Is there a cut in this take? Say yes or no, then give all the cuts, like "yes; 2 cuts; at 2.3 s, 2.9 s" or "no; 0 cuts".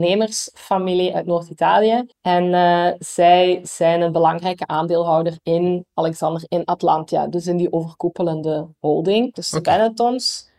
yes; 2 cuts; at 2.1 s, 9.3 s